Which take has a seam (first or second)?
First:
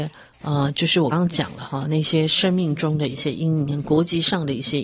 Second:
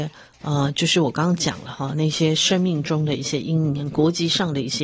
first